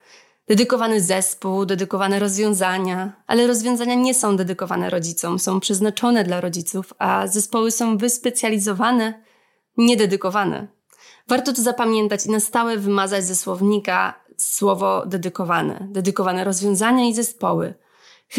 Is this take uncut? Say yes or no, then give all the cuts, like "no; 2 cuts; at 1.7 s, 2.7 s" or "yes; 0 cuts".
no; 1 cut; at 3.3 s